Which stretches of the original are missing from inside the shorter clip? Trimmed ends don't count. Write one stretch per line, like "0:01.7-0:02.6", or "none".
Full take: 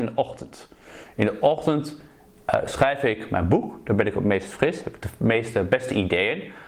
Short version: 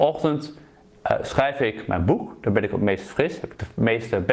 none